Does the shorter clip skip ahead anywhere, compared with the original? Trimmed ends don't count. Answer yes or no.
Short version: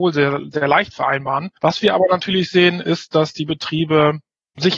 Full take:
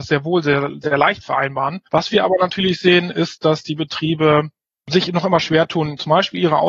no